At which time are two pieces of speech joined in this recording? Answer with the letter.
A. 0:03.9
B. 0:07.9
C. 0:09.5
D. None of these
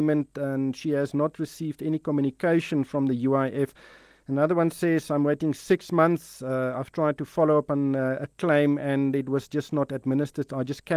D